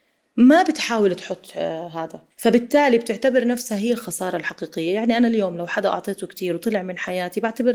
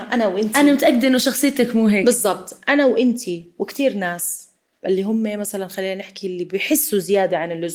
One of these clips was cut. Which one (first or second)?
first